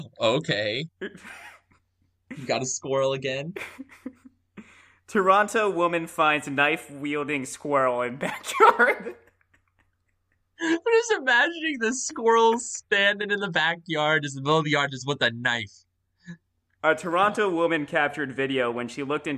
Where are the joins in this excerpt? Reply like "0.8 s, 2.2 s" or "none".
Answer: 16.8 s